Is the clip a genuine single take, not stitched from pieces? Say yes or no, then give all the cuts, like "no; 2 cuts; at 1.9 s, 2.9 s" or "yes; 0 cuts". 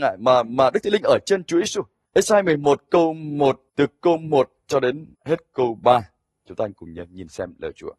no; 3 cuts; at 2.0 s, 3.7 s, 5.1 s